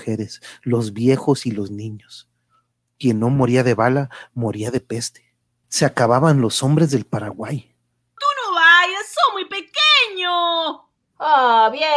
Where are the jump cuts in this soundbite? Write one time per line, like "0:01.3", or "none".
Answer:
0:05.6
0:08.2